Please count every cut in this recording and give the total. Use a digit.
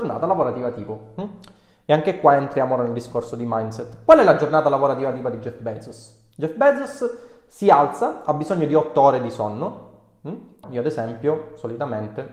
1